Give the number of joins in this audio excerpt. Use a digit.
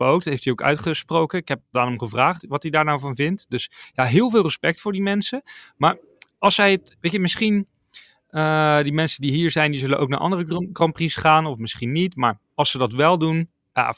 1